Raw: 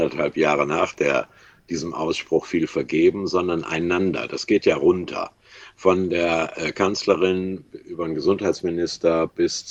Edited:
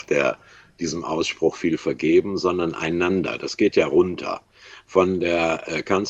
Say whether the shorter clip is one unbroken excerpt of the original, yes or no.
yes